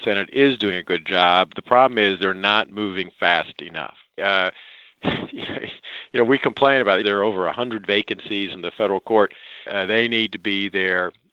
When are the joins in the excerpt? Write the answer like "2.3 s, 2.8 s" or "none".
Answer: 4.2 s, 7.0 s, 9.7 s